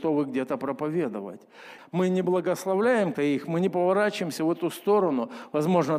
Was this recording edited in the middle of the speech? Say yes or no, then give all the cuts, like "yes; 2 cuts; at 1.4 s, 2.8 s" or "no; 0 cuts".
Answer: yes; 2 cuts; at 1.8 s, 3.1 s